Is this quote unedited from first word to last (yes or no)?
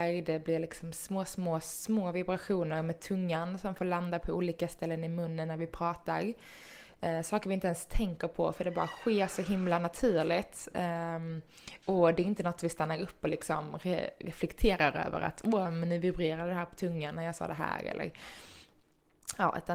yes